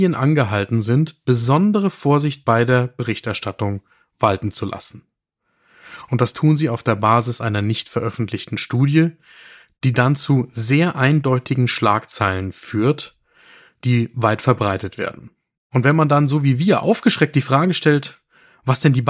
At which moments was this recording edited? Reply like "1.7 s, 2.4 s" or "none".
none